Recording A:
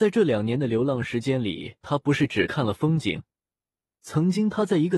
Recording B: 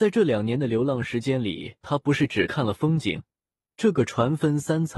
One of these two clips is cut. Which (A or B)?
B